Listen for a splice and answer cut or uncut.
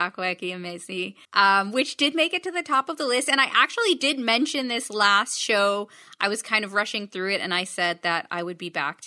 cut